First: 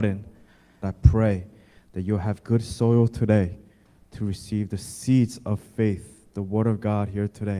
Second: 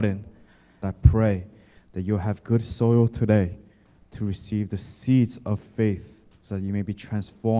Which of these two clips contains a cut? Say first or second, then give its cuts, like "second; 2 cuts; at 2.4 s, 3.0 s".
second; 1 cut; at 6.3 s